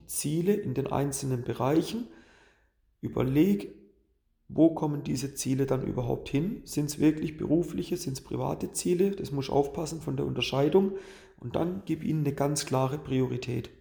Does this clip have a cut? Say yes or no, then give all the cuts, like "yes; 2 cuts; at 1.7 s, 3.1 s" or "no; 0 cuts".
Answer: no; 0 cuts